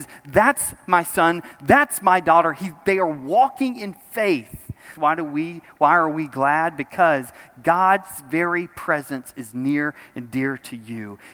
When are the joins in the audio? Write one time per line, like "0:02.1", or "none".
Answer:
0:04.9

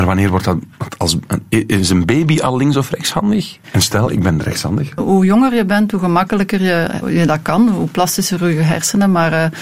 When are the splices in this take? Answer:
0:03.6
0:05.0
0:07.0

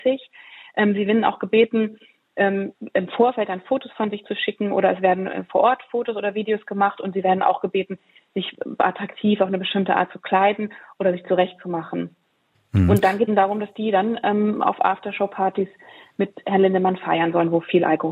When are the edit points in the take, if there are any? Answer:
0:13.3

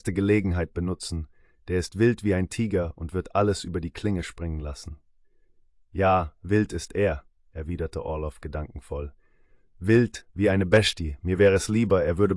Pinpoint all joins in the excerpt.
none

